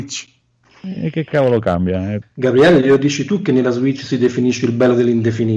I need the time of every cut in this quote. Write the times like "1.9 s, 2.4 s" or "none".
2.2 s